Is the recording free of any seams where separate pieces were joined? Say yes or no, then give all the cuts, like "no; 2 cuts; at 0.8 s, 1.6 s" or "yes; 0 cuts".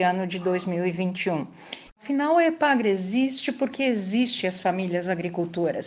no; 1 cut; at 1.9 s